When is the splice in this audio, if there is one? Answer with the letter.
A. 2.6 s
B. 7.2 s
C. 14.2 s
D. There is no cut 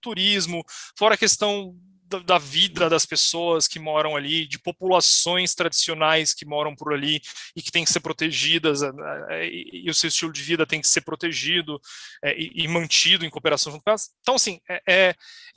D